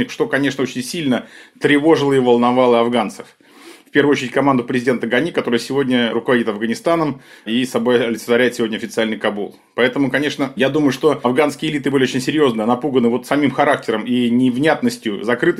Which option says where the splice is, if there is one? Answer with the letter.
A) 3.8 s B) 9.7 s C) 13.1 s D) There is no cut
D